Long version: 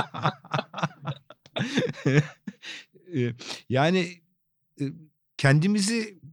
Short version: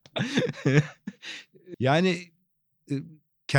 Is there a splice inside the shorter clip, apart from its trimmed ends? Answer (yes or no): yes